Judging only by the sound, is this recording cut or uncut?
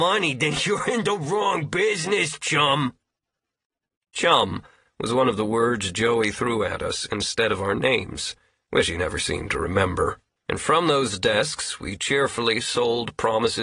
cut